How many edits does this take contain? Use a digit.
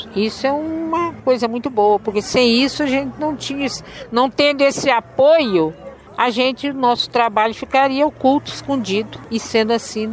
0